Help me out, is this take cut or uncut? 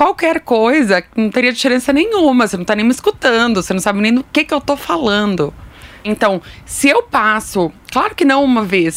cut